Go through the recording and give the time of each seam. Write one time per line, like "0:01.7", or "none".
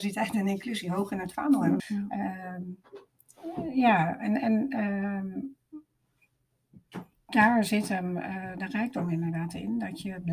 0:01.8